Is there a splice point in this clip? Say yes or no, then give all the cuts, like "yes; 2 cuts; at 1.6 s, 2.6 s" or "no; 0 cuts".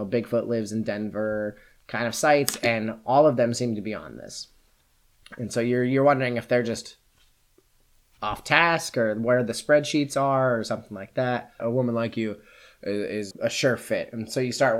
yes; 2 cuts; at 11.6 s, 13.3 s